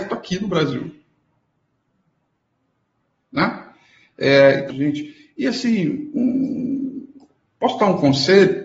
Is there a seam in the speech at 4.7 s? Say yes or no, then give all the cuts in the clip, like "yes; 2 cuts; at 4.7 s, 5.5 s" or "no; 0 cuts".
yes; 1 cut; at 4.7 s